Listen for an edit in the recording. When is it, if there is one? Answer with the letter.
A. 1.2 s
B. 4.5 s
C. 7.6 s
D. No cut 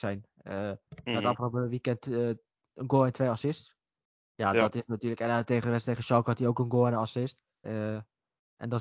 C